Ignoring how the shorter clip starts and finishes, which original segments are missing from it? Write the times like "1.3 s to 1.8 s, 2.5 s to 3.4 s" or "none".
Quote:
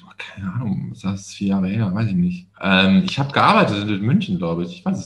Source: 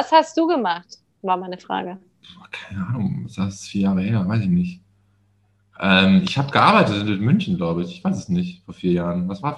4.9 s to 5.7 s